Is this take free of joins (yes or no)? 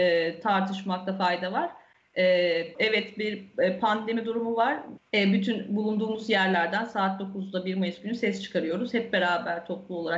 no